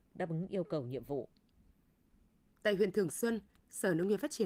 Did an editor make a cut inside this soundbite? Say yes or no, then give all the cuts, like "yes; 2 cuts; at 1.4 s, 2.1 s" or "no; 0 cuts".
no; 0 cuts